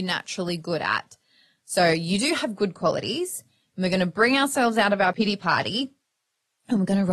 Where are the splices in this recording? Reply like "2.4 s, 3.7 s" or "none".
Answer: 1.6 s